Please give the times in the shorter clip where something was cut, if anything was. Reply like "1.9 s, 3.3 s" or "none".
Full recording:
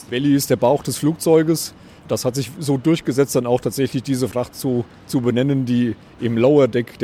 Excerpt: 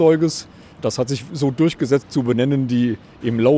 2.0 s